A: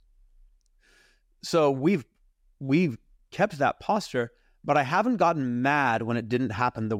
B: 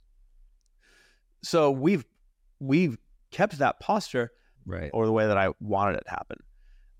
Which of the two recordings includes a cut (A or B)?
B